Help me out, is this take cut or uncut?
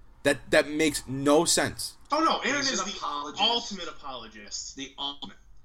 cut